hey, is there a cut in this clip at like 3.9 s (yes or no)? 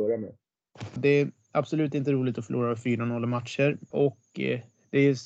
yes